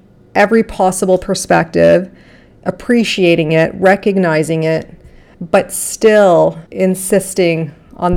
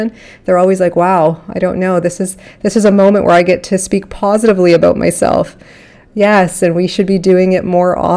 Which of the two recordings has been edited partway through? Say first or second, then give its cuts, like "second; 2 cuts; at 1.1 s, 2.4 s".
first; 2 cuts; at 5.3 s, 6.7 s